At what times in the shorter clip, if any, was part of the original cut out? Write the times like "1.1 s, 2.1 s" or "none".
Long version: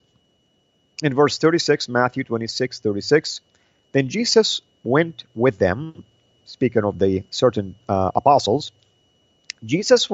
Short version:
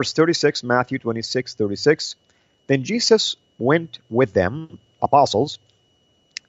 5.0 s